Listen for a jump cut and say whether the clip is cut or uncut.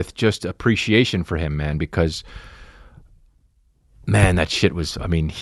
uncut